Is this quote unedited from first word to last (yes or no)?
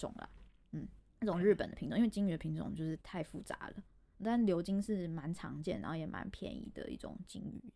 yes